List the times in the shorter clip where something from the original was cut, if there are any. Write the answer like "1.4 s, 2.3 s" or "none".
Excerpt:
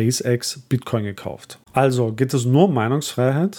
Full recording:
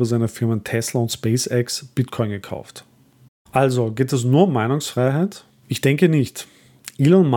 1.6 s